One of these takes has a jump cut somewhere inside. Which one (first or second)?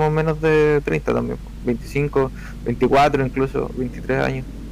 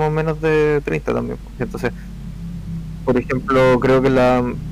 second